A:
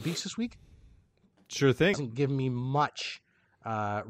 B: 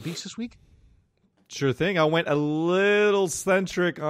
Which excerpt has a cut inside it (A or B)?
A